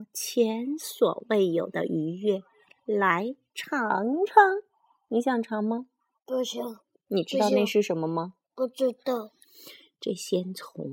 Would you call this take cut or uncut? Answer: uncut